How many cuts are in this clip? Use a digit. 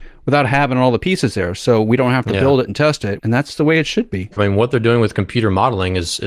2